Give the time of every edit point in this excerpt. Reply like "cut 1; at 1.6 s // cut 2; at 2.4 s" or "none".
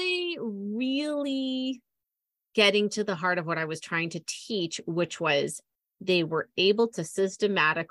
none